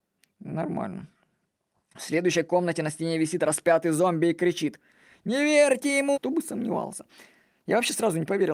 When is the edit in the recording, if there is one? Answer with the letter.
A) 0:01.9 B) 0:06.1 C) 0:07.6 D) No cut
B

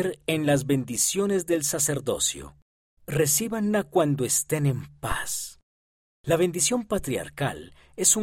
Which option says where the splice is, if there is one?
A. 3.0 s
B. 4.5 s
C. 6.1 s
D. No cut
A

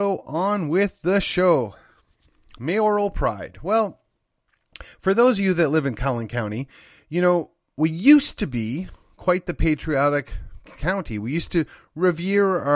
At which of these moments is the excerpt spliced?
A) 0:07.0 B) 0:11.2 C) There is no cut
C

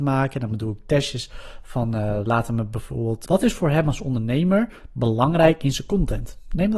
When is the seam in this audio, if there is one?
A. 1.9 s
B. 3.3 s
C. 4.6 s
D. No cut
B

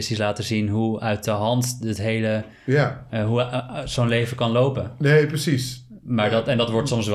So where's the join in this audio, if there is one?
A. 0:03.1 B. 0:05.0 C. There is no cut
C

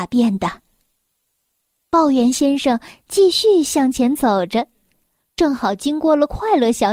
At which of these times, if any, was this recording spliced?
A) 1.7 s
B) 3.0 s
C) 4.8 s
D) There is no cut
D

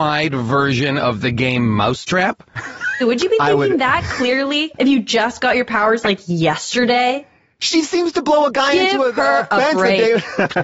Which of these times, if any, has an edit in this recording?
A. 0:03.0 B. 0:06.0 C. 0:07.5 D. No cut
A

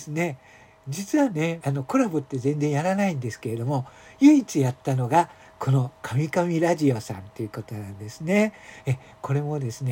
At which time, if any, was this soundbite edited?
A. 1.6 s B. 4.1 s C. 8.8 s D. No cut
A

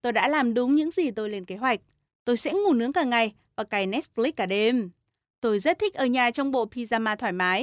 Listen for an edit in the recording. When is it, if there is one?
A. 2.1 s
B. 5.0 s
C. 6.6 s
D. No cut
A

